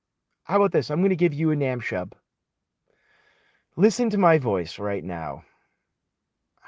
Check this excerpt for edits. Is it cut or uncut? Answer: uncut